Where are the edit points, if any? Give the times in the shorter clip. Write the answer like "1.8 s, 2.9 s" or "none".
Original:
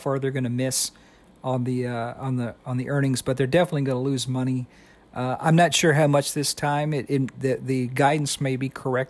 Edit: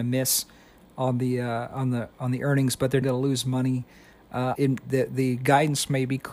3.0 s, 4.5 s